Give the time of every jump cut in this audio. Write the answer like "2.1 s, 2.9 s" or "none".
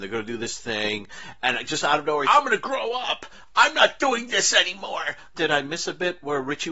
2.2 s, 5.3 s